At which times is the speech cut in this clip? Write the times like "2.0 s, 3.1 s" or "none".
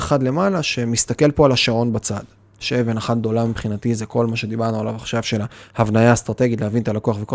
2.6 s